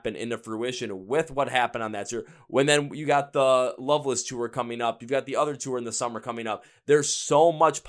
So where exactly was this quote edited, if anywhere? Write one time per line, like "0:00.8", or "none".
none